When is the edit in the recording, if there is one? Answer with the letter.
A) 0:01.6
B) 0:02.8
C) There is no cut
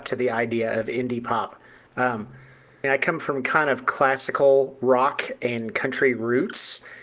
B